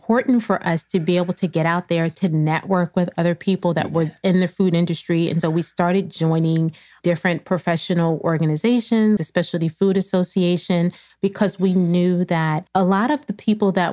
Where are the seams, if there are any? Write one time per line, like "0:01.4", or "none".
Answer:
0:05.4
0:09.2
0:12.7